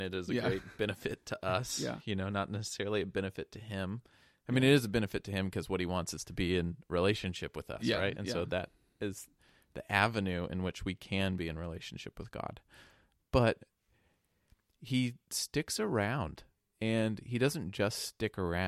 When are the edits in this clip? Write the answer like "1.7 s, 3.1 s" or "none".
none